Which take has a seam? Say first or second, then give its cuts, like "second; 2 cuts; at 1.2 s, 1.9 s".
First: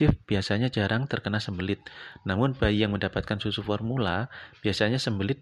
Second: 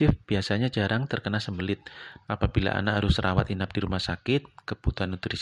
second; 1 cut; at 2.2 s